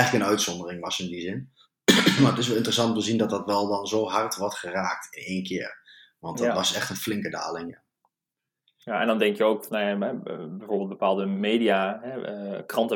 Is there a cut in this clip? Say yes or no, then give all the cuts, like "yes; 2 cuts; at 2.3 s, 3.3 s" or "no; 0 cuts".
no; 0 cuts